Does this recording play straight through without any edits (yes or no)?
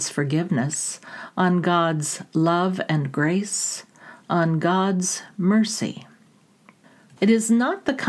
no